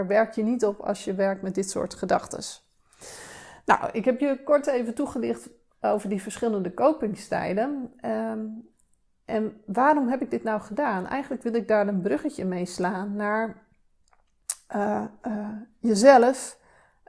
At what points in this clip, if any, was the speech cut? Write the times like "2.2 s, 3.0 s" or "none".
none